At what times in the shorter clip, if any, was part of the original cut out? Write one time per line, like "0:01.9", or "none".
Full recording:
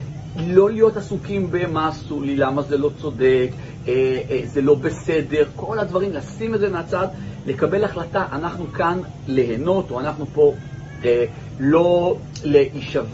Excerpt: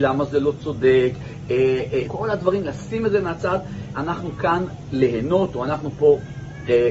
0:02.1
0:03.9

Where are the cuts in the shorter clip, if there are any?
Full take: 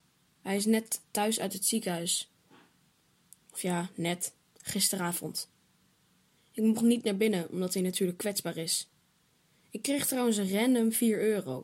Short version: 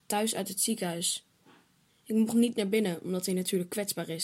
0:01.9

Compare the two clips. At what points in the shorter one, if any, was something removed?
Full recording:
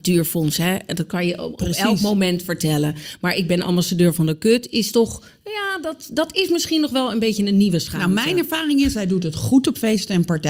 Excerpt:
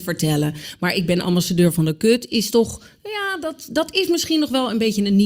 none

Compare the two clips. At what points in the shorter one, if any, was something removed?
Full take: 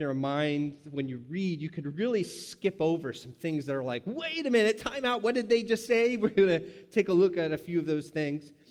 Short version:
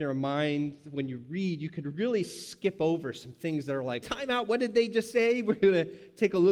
0:04.0

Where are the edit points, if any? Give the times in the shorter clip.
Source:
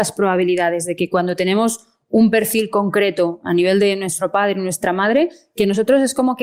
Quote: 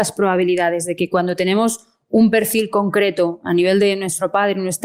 none

